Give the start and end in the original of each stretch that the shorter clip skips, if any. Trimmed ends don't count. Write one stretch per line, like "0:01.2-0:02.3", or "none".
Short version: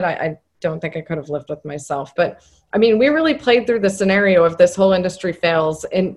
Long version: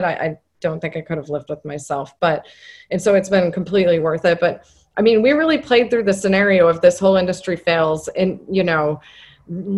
0:02.2-0:04.4